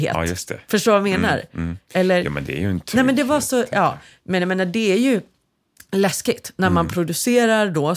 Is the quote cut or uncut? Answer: uncut